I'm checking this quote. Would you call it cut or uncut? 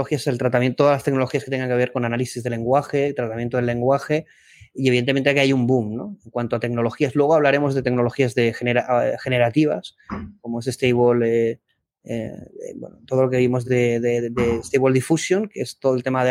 uncut